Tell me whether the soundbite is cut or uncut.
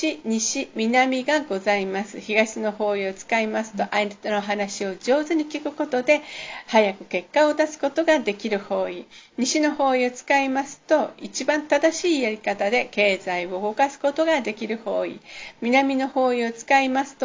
uncut